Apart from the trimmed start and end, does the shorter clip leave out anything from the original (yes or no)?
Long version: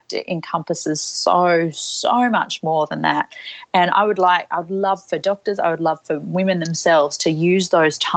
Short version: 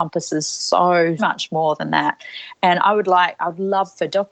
yes